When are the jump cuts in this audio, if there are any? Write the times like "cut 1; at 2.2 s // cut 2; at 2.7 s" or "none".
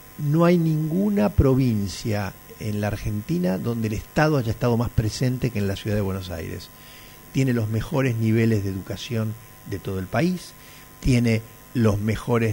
none

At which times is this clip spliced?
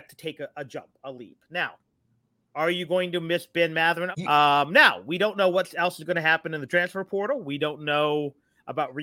cut 1; at 4.1 s

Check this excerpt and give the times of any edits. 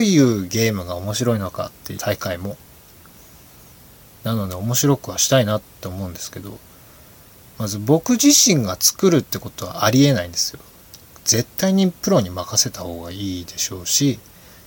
cut 1; at 2.0 s

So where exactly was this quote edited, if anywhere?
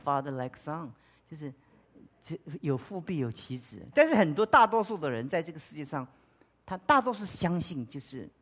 cut 1; at 3.9 s

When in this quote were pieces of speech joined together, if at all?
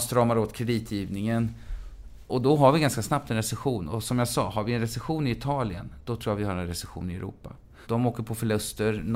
cut 1; at 7.8 s

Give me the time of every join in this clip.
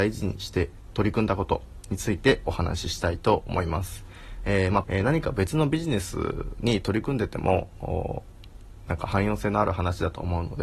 cut 1; at 4.8 s

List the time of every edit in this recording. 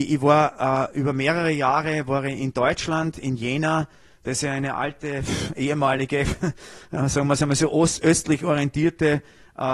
none

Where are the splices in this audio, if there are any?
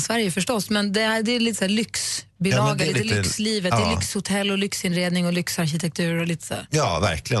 none

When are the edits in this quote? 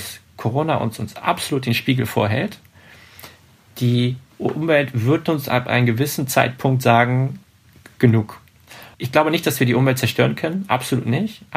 cut 1; at 8.9 s

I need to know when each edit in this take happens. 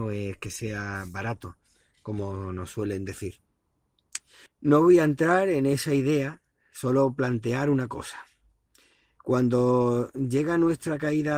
cut 1; at 4.5 s

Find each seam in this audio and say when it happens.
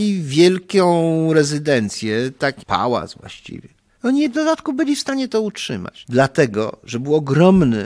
cut 1; at 2.6 s // cut 2; at 4.0 s // cut 3; at 6.0 s

